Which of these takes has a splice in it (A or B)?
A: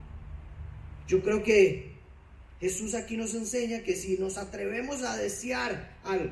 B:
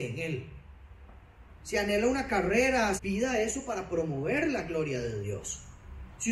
B